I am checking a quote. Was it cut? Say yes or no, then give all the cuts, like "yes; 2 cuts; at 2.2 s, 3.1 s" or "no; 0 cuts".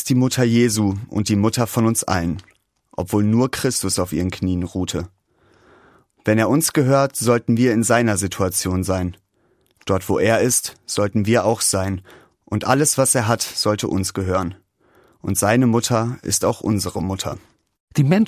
no; 0 cuts